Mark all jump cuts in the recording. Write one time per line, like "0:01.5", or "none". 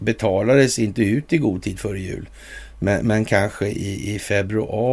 none